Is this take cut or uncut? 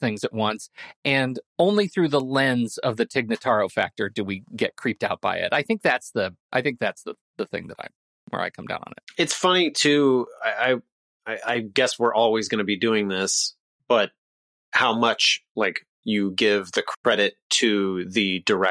uncut